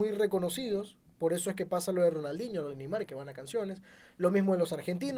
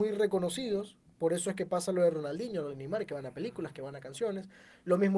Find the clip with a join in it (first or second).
first